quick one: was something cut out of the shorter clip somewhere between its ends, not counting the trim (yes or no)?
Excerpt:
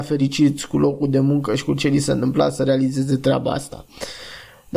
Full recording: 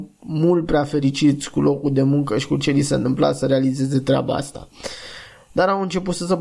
no